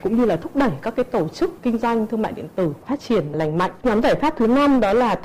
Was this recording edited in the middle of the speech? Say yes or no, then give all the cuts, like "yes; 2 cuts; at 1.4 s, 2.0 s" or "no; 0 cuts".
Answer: yes; 1 cut; at 3.8 s